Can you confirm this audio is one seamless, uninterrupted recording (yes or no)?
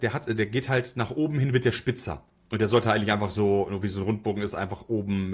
yes